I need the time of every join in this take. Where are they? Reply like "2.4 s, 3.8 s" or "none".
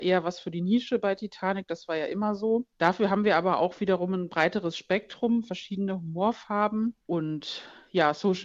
2.7 s, 7.0 s